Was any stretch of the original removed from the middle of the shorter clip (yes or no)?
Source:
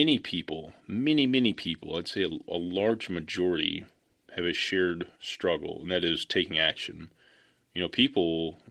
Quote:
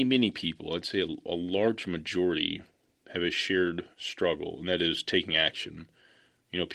no